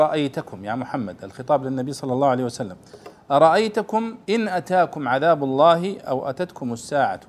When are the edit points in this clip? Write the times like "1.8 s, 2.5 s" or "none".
4.2 s

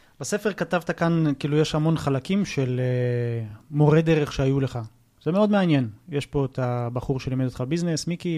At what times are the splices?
none

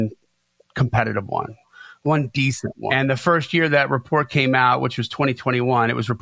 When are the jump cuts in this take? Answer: 2.9 s

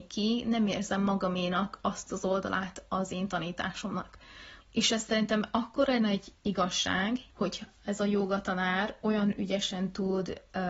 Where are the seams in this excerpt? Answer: 4.6 s, 7.3 s

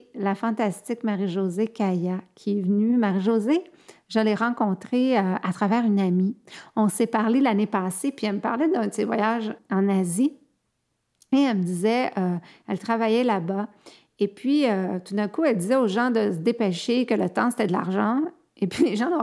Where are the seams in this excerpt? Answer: none

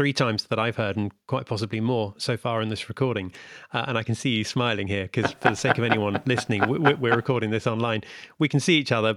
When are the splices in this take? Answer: none

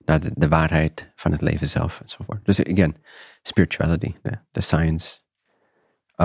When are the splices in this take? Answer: none

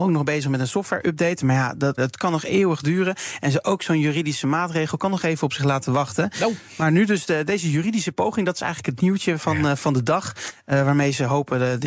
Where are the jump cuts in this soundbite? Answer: 2.0 s

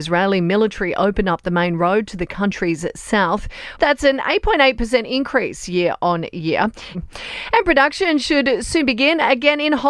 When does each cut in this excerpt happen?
3.8 s, 6.9 s

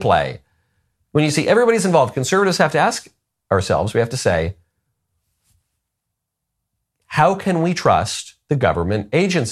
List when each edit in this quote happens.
none

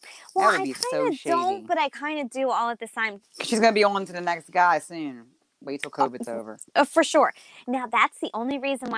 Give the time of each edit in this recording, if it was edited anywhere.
3.2 s

